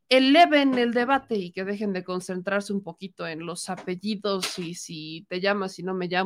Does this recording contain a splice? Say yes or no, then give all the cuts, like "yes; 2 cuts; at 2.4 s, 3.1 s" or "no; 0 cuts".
no; 0 cuts